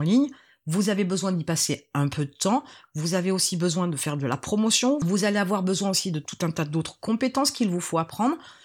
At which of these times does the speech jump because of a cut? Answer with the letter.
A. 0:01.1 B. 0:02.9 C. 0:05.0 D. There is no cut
D